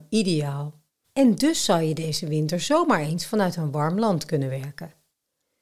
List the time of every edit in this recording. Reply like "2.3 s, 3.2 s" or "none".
1.0 s